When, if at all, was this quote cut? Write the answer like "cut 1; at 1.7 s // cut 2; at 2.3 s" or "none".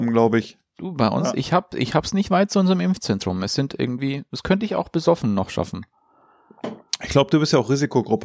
none

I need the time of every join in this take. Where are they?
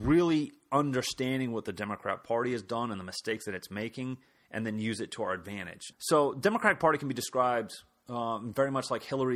cut 1; at 5.9 s

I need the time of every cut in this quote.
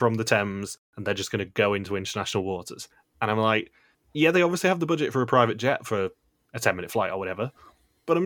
cut 1; at 6.4 s

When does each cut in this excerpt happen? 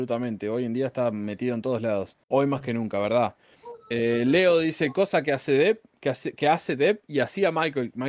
cut 1; at 2.2 s

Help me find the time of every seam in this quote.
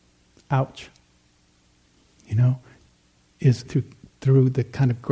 cut 1; at 3.7 s

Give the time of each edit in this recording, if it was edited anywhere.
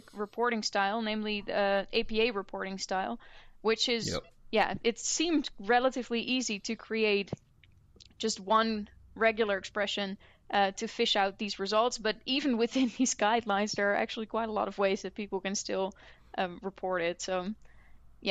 cut 1; at 4.4 s

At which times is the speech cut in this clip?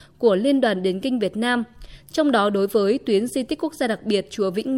cut 1; at 2.0 s

